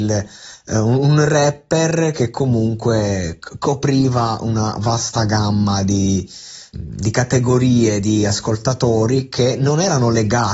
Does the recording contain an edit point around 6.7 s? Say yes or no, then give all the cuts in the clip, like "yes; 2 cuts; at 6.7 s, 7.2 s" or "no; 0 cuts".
yes; 1 cut; at 6.7 s